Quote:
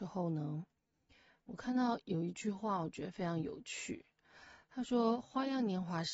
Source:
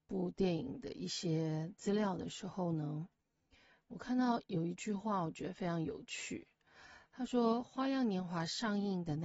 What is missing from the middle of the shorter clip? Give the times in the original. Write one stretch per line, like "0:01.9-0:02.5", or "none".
none